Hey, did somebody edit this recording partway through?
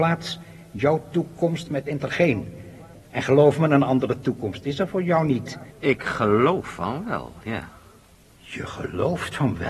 yes; 1 cut; at 5.7 s

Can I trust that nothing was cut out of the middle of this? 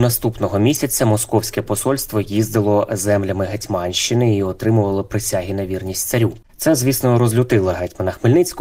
no; 1 cut; at 6.4 s

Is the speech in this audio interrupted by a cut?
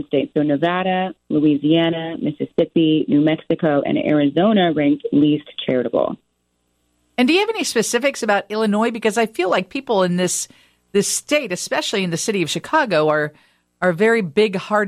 no; 0 cuts

